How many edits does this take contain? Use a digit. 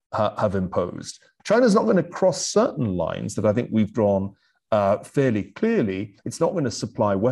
1